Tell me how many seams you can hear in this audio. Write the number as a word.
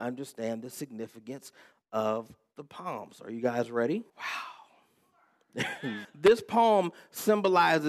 two